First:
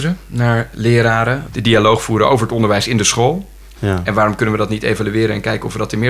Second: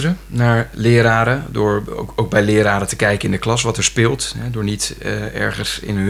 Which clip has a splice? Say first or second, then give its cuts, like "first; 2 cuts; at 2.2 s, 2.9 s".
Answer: first; 2 cuts; at 1.5 s, 3.7 s